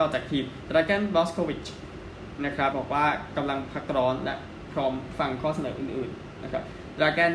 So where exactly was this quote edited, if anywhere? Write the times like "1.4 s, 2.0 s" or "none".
2.7 s